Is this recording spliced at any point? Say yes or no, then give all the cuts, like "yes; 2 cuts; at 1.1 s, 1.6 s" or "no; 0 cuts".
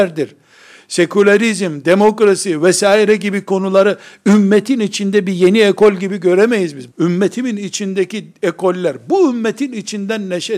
yes; 1 cut; at 6.9 s